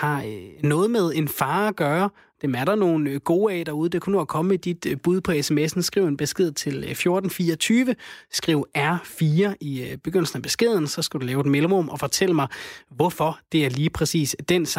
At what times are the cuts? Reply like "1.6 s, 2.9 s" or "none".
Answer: none